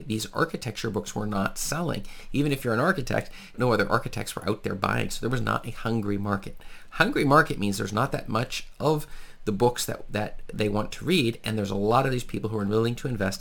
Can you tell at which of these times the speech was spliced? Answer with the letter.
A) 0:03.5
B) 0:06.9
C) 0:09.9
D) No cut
A